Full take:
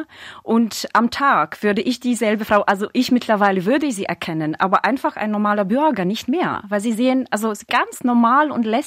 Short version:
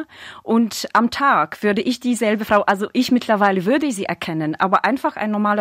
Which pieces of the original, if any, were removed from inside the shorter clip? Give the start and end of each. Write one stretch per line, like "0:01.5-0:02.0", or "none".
none